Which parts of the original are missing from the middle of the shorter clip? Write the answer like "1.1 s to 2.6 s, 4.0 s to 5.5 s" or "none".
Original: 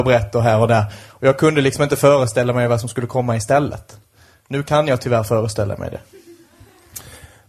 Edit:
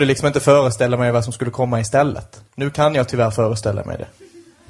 4.0 s to 4.4 s